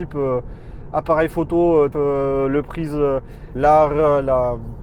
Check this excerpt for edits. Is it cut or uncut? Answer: cut